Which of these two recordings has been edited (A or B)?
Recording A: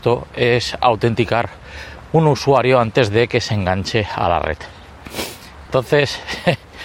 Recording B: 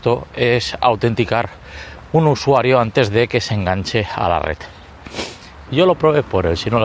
B